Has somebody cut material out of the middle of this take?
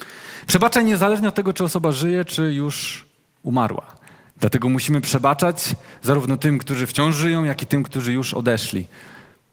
yes; 1 cut; at 4.3 s

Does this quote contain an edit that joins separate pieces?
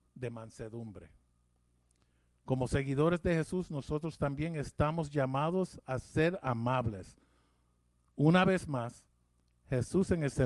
no; 0 cuts

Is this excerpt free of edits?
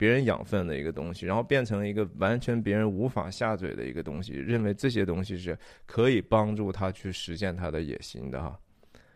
yes; 0 cuts

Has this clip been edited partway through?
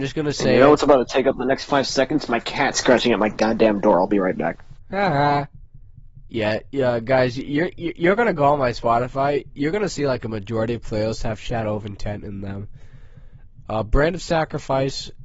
no; 0 cuts

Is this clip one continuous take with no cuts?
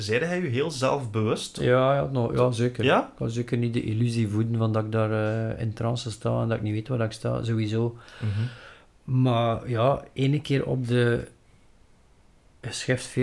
yes; 0 cuts

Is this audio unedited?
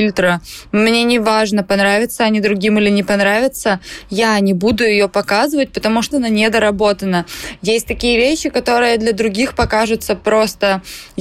no; 1 cut; at 6.1 s

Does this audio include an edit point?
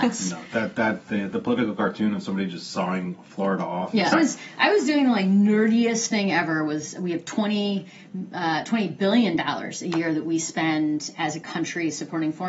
yes; 1 cut; at 4.1 s

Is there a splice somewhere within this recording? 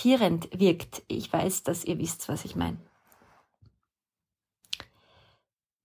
no; 0 cuts

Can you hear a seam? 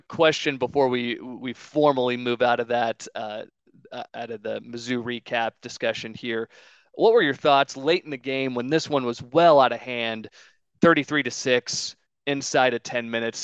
no; 0 cuts

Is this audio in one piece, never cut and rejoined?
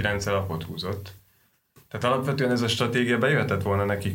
yes; 0 cuts

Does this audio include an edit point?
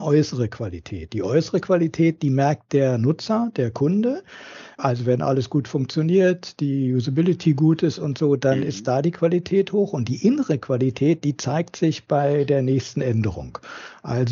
no; 0 cuts

